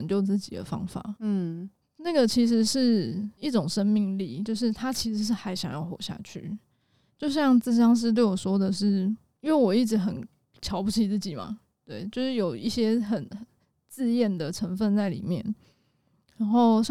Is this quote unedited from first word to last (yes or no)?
no